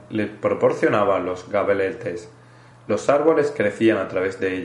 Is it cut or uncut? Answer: cut